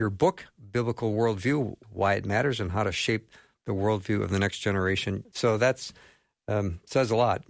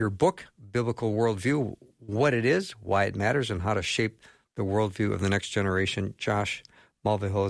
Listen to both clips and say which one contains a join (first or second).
first